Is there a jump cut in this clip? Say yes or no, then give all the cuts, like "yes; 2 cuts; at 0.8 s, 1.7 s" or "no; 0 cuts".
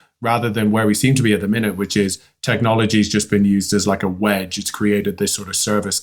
no; 0 cuts